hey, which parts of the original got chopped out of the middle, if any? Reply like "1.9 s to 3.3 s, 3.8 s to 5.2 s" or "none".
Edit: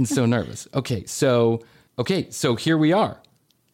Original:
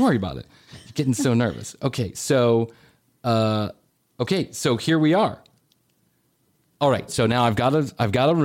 3.0 s to 4.1 s